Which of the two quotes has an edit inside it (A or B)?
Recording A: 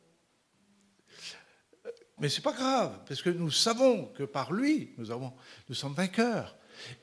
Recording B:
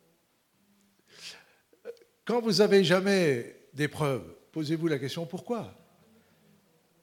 A